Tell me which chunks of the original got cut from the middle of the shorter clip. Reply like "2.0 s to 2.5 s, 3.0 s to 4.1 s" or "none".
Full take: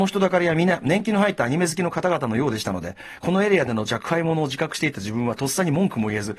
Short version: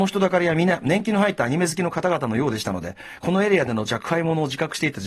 none